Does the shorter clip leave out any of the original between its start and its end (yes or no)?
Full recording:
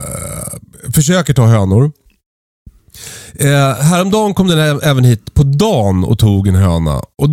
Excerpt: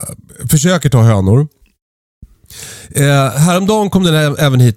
no